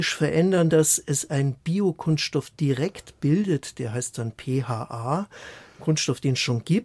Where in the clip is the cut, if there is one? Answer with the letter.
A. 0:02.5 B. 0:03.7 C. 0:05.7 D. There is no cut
D